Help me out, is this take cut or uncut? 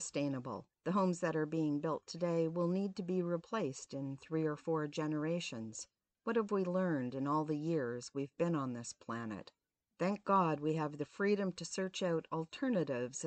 uncut